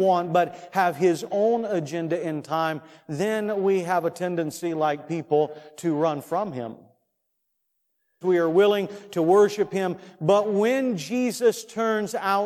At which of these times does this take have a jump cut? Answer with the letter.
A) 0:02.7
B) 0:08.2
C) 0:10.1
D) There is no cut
B